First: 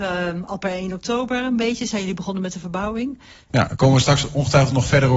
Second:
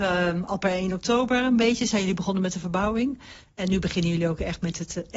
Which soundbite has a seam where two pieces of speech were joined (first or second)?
first